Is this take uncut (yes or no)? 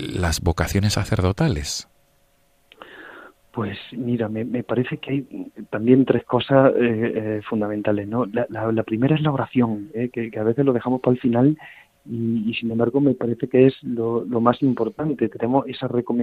yes